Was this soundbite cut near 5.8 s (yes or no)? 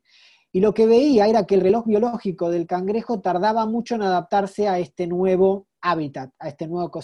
yes